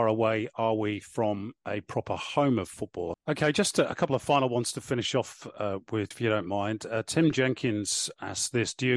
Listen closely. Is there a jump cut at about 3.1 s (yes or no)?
yes